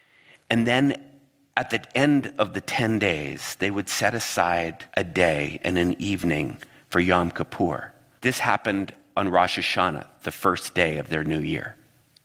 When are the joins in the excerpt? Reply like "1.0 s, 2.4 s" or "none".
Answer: 4.9 s, 8.2 s